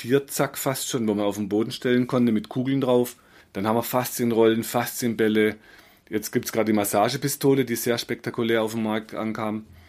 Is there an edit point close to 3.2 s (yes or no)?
no